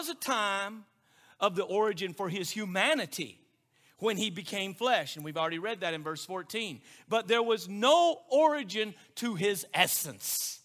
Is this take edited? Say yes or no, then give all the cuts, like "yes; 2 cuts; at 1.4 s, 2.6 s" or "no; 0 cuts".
no; 0 cuts